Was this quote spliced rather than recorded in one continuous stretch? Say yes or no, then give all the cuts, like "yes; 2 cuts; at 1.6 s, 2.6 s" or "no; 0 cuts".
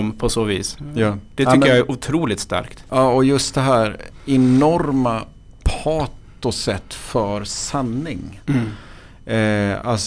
no; 0 cuts